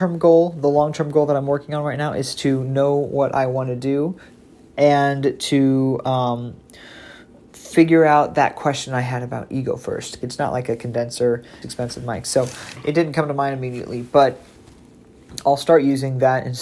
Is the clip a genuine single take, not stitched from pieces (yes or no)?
no